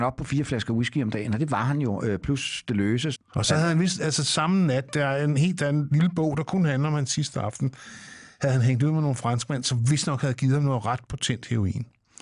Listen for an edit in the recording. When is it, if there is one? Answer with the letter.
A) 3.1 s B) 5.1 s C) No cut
A